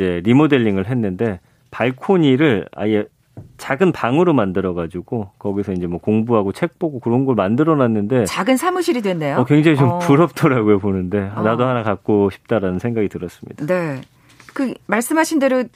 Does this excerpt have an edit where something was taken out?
no; 0 cuts

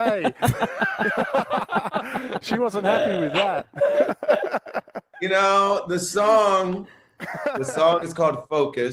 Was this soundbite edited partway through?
no; 0 cuts

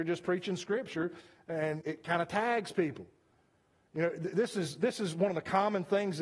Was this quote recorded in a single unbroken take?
no; 1 cut; at 1.8 s

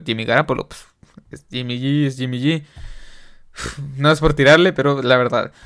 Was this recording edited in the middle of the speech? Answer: no; 0 cuts

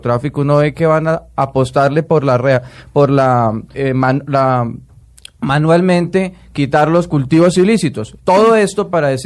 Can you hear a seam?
yes; 2 cuts; at 3.7 s, 8.2 s

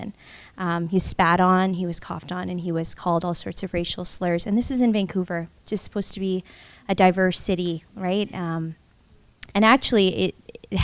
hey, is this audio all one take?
no; 1 cut; at 9.5 s

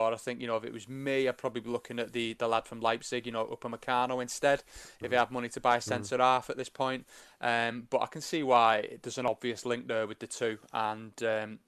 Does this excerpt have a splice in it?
no; 0 cuts

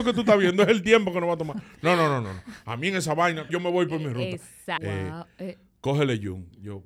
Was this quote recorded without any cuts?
no; 2 cuts; at 3.5 s, 4.8 s

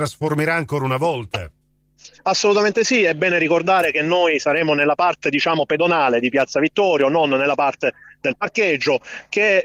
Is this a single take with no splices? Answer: yes; 0 cuts

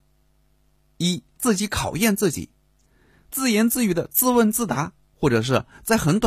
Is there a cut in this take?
yes; 1 cut; at 1.4 s

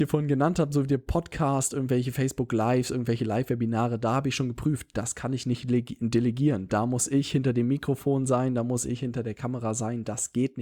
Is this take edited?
no; 0 cuts

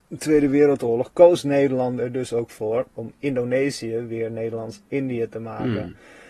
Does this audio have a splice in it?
no; 0 cuts

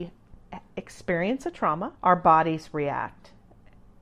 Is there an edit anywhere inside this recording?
yes; 1 cut; at 2.0 s

